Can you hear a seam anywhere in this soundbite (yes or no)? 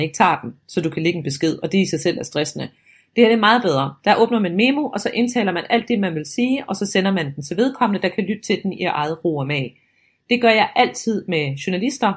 no